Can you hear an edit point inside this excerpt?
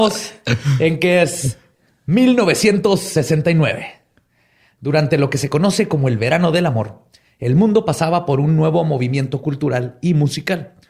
no; 0 cuts

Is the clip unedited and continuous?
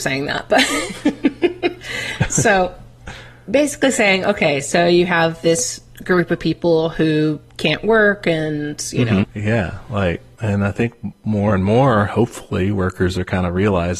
no; 1 cut; at 9.2 s

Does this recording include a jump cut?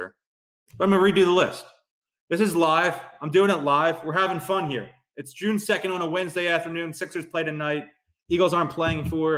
no; 0 cuts

